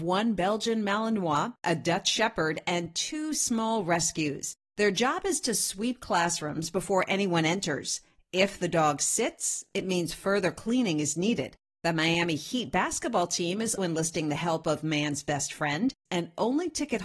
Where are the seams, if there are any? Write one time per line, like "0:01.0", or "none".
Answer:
0:13.8
0:16.1